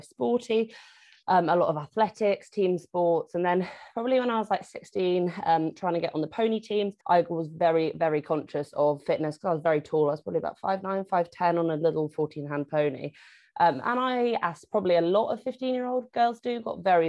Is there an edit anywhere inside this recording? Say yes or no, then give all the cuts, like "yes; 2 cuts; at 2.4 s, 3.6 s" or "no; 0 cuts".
yes; 1 cut; at 7.0 s